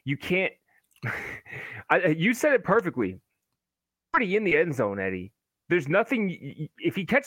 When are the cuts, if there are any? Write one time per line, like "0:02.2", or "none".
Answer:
none